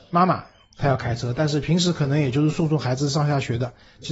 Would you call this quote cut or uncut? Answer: uncut